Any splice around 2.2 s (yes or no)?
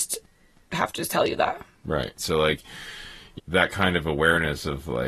yes